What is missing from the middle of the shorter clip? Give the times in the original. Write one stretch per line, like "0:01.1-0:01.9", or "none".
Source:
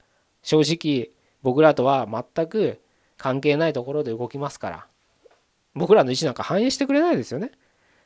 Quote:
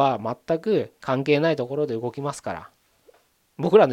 0:02.8-0:03.1